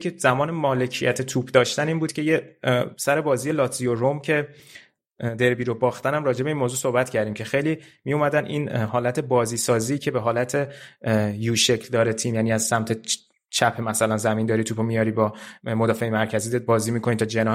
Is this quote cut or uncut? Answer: uncut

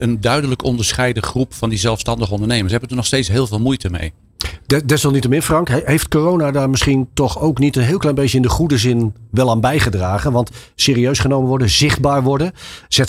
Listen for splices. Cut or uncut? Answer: uncut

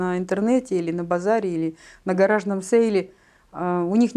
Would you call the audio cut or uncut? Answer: uncut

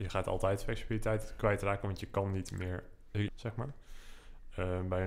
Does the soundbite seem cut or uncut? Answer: cut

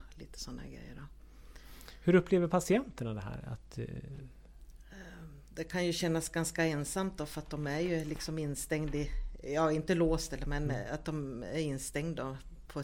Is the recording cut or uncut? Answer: uncut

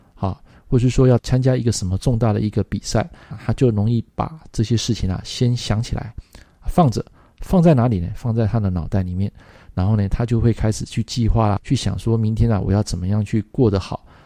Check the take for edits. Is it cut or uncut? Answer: cut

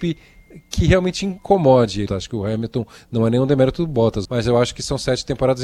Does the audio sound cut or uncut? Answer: cut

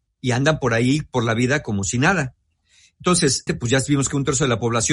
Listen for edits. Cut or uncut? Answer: cut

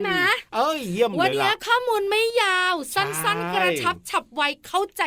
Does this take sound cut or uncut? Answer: cut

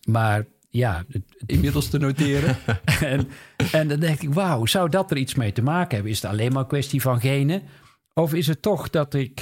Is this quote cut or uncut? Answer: cut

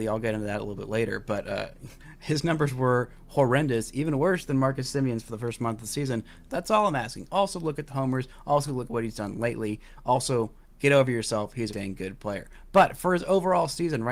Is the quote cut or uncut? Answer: cut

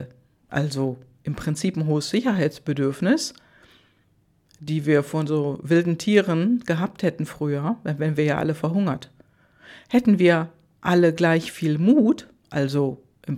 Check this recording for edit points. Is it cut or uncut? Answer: uncut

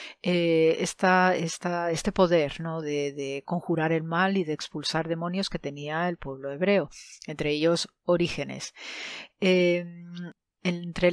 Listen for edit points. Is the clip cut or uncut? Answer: uncut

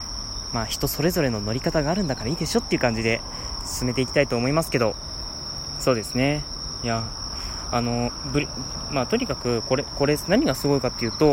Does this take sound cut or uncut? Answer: uncut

